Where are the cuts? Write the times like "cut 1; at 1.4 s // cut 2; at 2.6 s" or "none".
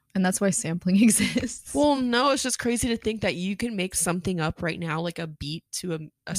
none